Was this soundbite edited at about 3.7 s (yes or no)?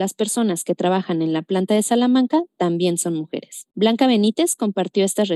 yes